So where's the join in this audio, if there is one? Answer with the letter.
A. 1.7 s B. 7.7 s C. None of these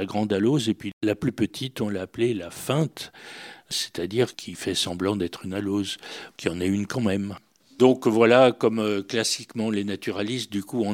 C